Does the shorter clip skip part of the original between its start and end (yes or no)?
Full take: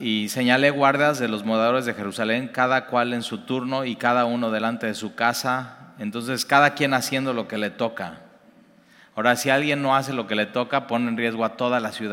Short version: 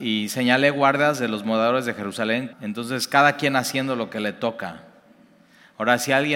yes